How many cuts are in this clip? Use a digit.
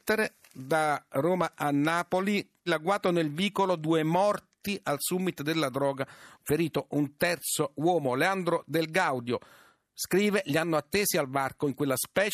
2